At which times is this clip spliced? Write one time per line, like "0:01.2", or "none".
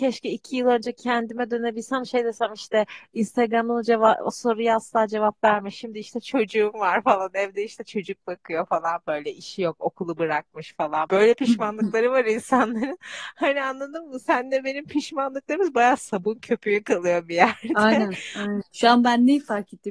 0:11.1
0:18.6